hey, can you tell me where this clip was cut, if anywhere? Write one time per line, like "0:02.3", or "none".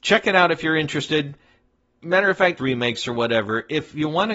0:02.6